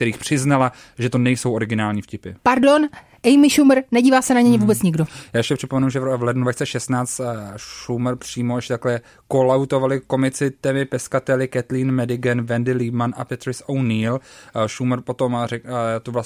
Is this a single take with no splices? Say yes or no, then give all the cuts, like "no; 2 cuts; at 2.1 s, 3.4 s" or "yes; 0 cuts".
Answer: no; 1 cut; at 2.4 s